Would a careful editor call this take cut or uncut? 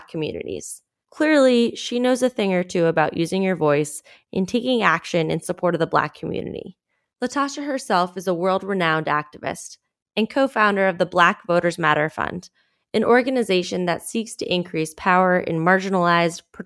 cut